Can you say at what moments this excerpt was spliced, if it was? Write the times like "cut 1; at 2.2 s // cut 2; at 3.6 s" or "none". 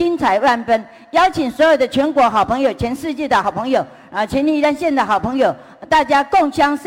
none

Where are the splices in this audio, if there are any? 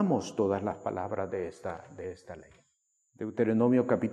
cut 1; at 3.1 s

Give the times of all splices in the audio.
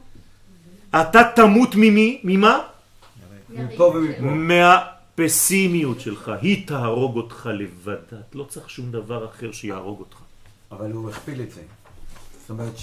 cut 1; at 10.7 s

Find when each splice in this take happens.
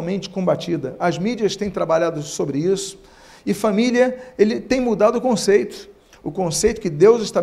none

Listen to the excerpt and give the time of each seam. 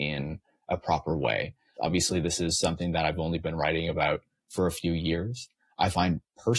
cut 1; at 1.8 s

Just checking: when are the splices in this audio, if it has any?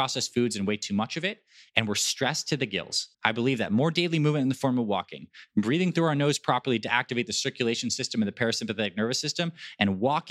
cut 1; at 3.1 s

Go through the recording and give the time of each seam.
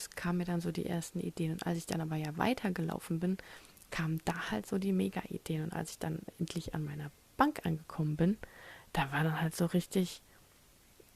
cut 1; at 3.9 s

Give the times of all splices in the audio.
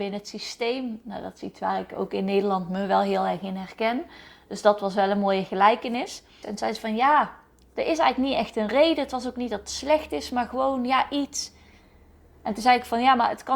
cut 1; at 6.4 s

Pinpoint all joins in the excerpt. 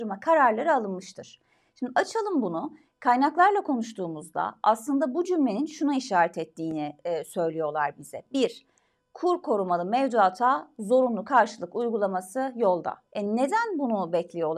cut 1; at 13.1 s

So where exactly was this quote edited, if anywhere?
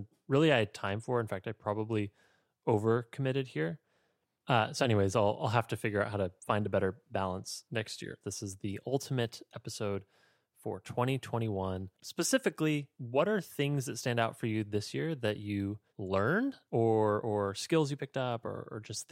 cut 1; at 8.2 s // cut 2; at 12.0 s // cut 3; at 15.9 s

